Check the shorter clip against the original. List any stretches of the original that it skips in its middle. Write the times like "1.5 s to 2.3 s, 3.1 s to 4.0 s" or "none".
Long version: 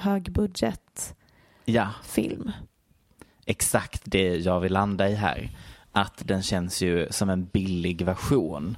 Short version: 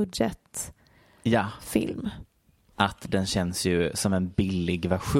3.1 s to 5.9 s